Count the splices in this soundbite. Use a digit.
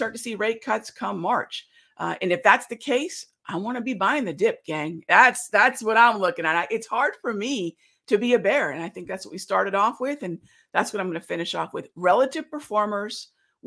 0